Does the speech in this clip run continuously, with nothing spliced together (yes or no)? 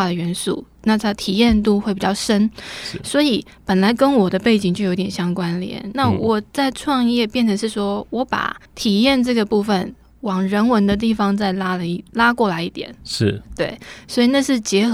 no